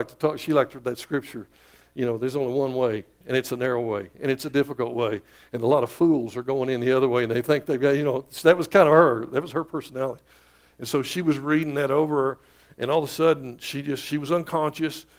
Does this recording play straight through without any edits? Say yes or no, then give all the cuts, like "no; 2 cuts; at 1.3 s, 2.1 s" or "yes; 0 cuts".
yes; 0 cuts